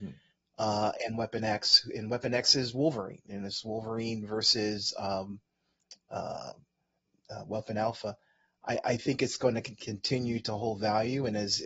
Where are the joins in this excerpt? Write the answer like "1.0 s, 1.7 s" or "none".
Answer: none